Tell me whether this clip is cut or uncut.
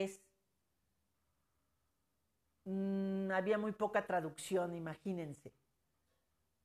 uncut